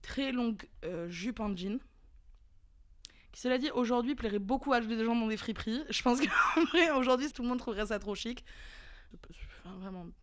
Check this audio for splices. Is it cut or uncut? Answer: cut